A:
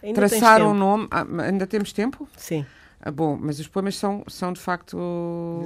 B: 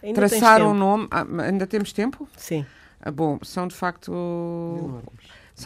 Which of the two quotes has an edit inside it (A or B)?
B